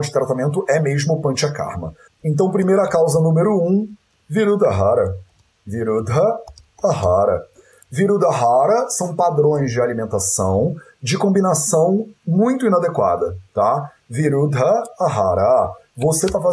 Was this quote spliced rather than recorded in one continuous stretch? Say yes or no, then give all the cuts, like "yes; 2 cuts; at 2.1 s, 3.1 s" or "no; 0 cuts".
yes; 1 cut; at 2.1 s